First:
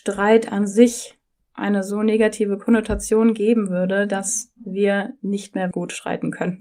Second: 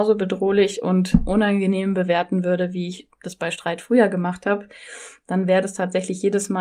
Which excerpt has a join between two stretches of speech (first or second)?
first